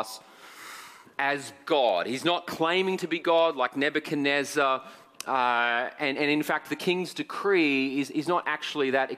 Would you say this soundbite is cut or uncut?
uncut